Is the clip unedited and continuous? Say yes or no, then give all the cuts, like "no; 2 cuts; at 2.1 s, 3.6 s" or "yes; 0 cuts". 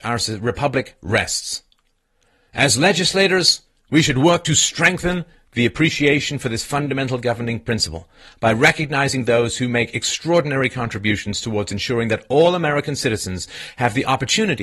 yes; 0 cuts